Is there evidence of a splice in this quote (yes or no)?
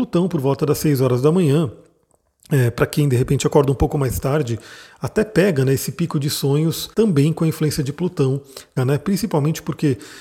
yes